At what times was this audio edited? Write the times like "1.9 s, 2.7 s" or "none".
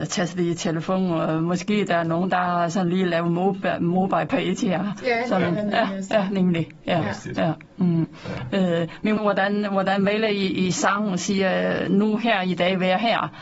9.2 s